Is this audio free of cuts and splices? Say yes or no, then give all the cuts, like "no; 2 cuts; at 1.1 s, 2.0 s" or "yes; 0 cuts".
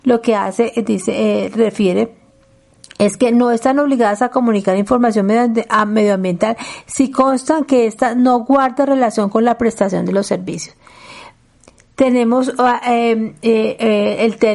yes; 0 cuts